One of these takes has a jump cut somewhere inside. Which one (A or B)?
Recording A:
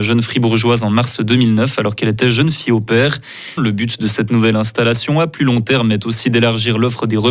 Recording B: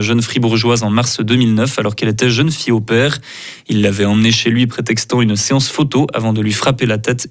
A